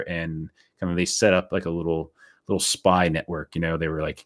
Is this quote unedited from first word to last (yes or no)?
yes